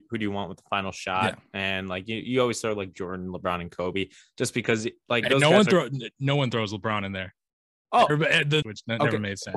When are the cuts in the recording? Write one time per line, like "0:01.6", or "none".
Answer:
0:08.6